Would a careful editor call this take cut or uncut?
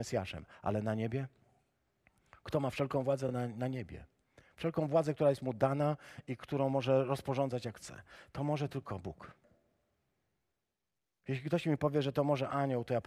uncut